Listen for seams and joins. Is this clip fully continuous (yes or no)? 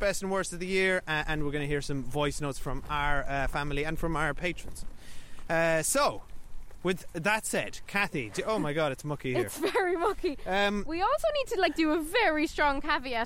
yes